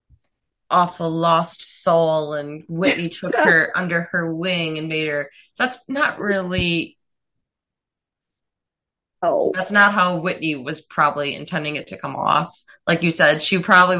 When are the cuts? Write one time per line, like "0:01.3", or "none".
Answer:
none